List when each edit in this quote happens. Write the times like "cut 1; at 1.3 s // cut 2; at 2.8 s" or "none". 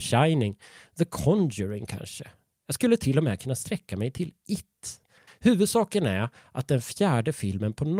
cut 1; at 5.3 s